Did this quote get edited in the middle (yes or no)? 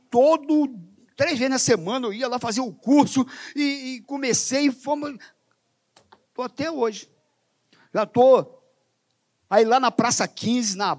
yes